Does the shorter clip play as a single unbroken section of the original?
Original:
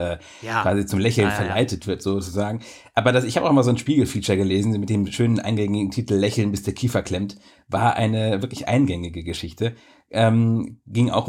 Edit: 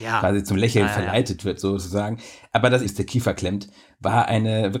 no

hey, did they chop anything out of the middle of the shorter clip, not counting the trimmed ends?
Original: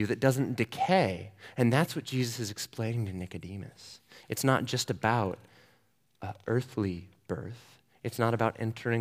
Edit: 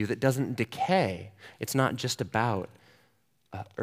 yes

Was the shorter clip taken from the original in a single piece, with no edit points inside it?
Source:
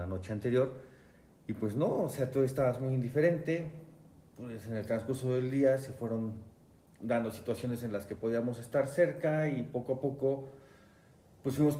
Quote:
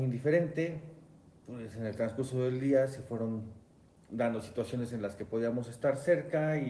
yes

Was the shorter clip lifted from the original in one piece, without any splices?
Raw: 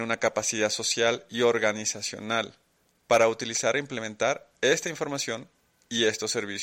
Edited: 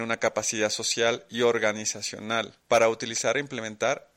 no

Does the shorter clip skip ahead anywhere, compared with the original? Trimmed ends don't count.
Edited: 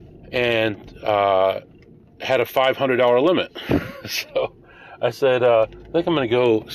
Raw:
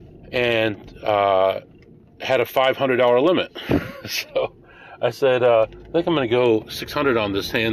no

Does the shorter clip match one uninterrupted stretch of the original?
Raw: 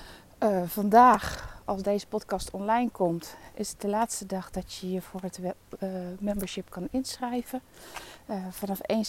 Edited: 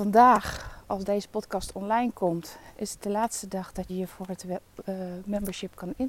no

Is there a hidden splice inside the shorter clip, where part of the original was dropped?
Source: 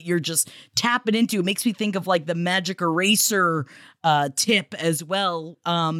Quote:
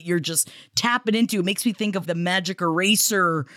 yes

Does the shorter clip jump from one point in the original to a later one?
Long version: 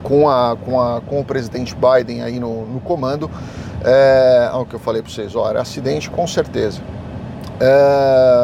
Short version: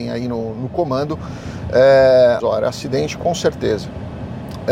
yes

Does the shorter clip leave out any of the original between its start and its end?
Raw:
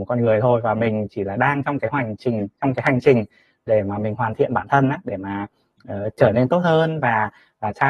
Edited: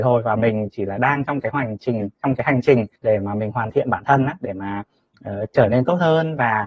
yes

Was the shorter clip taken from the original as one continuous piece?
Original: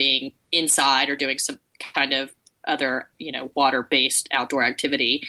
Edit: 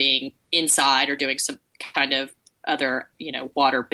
yes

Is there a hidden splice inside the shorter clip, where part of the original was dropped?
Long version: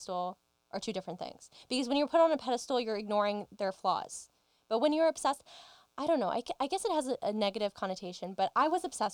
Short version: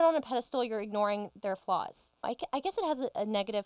yes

